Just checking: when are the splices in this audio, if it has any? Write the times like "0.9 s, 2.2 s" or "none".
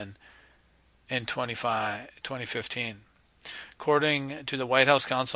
none